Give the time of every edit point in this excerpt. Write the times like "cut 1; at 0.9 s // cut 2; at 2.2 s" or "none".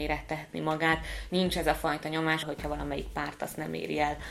cut 1; at 1.3 s // cut 2; at 2.4 s